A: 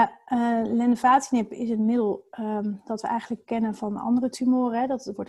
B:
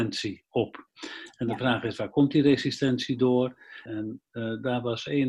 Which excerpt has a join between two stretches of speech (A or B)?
B